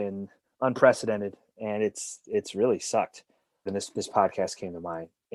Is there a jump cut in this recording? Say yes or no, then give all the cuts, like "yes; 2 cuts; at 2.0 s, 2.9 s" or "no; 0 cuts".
yes; 1 cut; at 3.7 s